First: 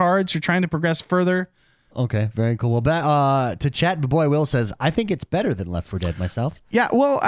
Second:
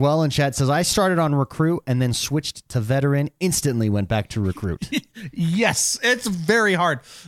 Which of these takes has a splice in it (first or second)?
first